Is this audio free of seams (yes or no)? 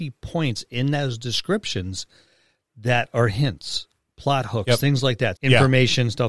no